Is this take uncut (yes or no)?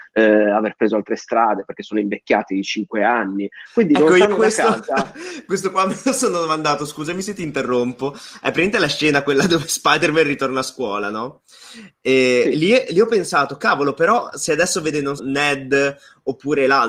no